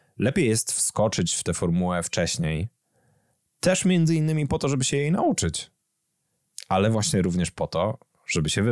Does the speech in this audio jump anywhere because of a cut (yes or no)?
no